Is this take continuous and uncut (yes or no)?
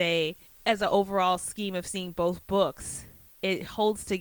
yes